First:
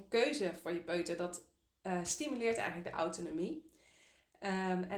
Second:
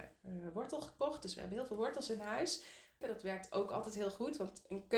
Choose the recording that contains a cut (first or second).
second